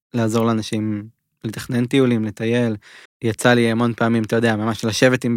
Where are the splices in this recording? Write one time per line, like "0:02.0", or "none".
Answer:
0:03.1